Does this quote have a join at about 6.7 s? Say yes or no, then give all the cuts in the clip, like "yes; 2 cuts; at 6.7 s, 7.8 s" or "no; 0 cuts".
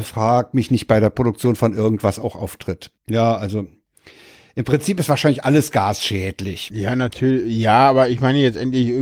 no; 1 cut; at 3.0 s